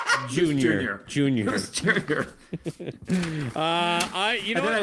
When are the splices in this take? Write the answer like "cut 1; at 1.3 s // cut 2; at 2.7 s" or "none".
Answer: none